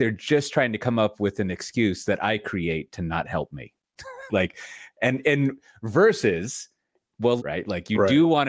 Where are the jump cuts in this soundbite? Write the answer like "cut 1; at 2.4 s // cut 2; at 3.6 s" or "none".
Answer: cut 1; at 4.3 s // cut 2; at 7.4 s

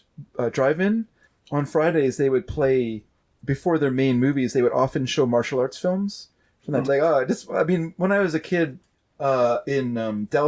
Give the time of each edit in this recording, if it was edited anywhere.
cut 1; at 6.8 s

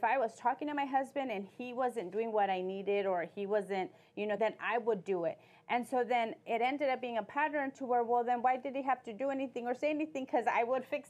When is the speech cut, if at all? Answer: cut 1; at 4.4 s

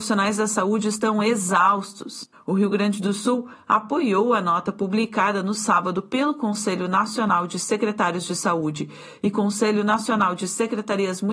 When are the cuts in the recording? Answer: cut 1; at 2.3 s

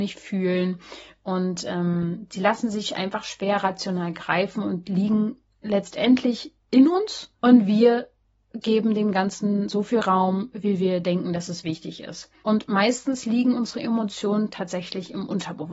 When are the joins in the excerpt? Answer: cut 1; at 7.3 s // cut 2; at 12.4 s

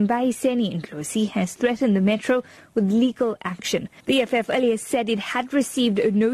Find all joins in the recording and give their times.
cut 1; at 4.0 s

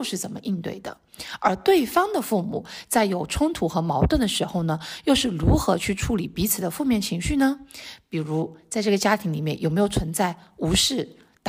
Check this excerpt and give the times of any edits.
none

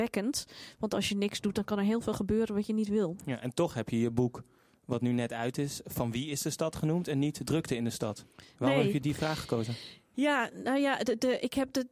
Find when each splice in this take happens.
none

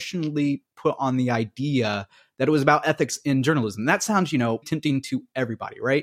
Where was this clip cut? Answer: cut 1; at 4.6 s

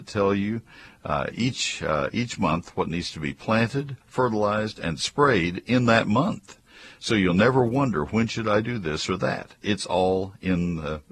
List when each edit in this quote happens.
cut 1; at 4.0 s

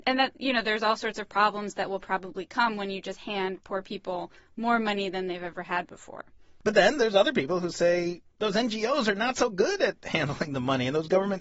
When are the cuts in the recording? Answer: cut 1; at 8.3 s

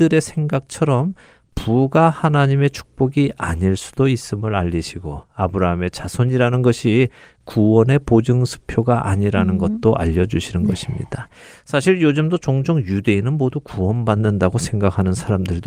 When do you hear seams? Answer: none

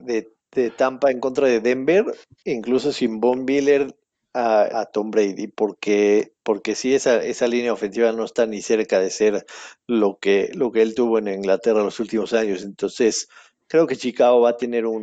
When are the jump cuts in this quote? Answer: cut 1; at 4.7 s

